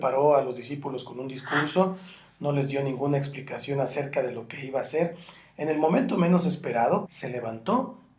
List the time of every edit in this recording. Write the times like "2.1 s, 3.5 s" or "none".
7.1 s